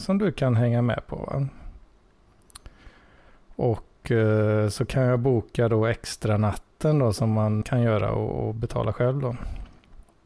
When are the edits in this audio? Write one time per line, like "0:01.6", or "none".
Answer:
0:07.6

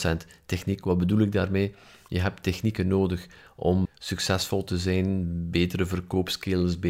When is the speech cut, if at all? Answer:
0:03.8

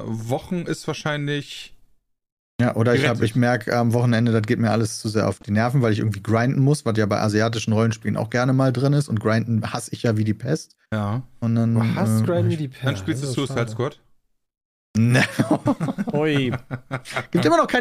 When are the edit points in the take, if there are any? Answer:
0:10.9

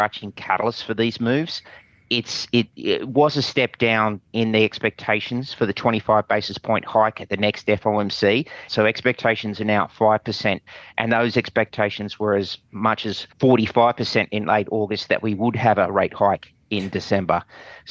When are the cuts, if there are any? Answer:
0:08.7
0:13.3

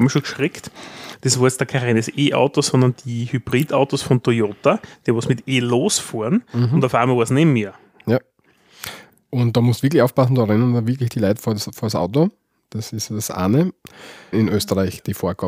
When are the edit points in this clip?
0:14.3

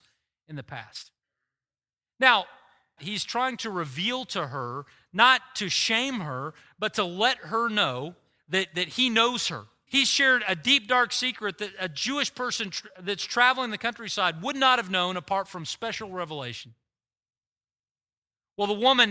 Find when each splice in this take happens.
0:03.0
0:09.9

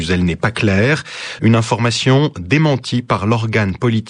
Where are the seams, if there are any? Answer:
0:01.4

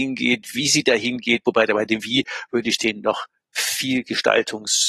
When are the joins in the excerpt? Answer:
none

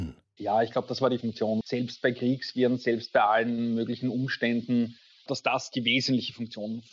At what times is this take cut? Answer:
0:01.6
0:05.3

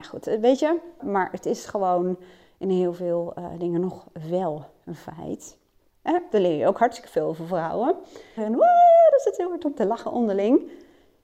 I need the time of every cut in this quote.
0:01.0
0:05.9
0:08.4

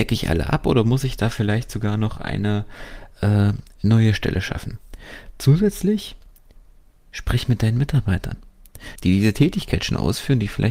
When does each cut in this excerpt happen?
0:09.0

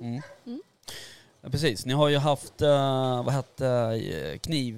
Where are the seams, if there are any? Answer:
none

